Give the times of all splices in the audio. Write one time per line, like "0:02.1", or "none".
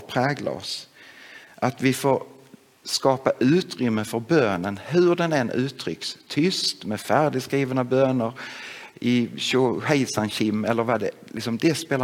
none